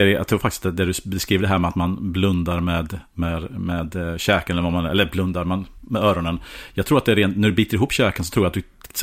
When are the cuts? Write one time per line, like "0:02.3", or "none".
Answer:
none

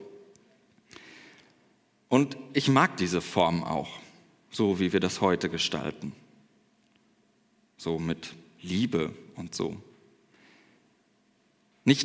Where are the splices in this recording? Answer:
none

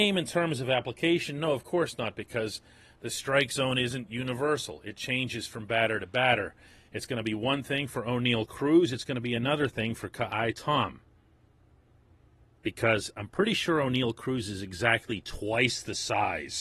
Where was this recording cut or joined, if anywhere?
none

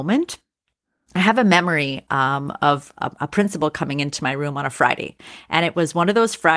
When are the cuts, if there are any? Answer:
none

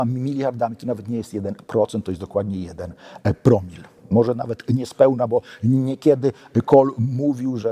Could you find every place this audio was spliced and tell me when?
none

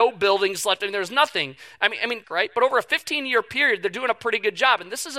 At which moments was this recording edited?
0:02.2

